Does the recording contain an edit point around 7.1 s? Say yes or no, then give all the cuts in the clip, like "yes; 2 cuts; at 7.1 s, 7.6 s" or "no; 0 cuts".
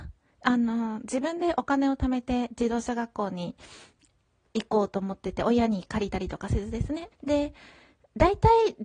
yes; 1 cut; at 7.1 s